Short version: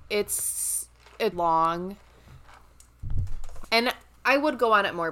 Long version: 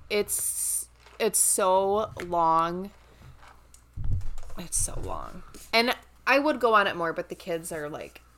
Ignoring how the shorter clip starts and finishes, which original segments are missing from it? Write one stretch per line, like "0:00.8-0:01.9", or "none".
0:01.3-0:02.3
0:04.6-0:05.7